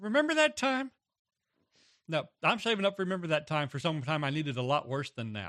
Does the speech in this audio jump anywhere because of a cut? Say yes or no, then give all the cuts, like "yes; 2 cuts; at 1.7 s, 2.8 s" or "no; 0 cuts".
no; 0 cuts